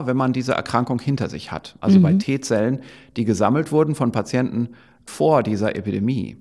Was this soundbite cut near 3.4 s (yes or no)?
no